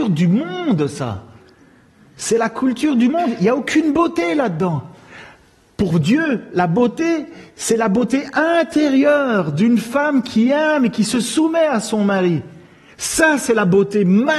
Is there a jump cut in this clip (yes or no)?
no